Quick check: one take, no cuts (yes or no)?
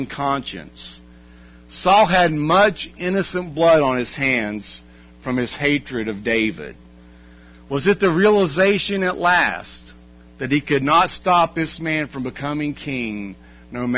yes